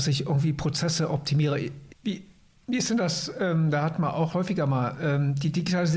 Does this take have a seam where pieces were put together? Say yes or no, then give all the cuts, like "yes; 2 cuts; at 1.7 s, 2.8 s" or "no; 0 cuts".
yes; 2 cuts; at 1.9 s, 4.3 s